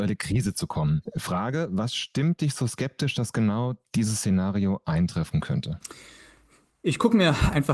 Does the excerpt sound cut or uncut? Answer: uncut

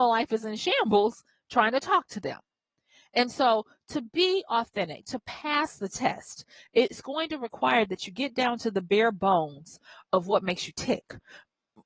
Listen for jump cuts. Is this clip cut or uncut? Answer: uncut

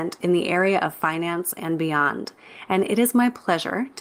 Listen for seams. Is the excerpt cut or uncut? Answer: uncut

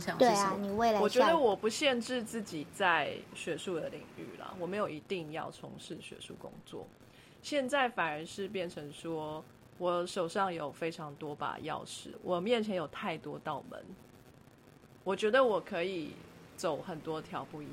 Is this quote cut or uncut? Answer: uncut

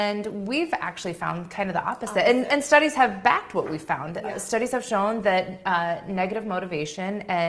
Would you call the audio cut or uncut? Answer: uncut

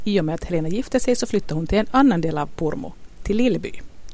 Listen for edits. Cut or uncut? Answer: uncut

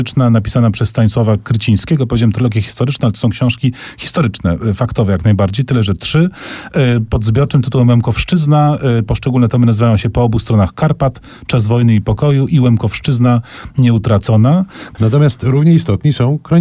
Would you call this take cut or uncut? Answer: cut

